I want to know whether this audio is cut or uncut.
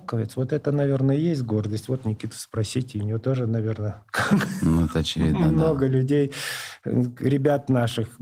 uncut